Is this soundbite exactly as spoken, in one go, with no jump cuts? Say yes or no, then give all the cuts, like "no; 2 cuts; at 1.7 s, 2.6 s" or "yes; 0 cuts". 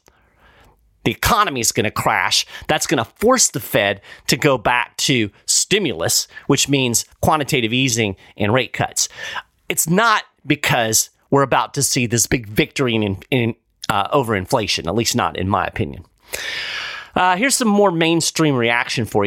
yes; 0 cuts